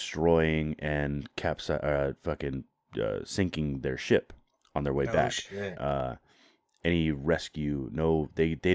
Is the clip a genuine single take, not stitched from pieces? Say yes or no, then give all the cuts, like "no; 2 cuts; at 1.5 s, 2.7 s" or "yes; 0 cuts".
no; 1 cut; at 5.8 s